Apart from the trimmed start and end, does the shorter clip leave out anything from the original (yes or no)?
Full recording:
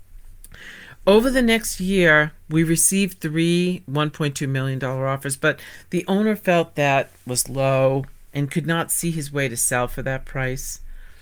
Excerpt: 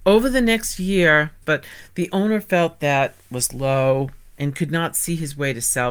yes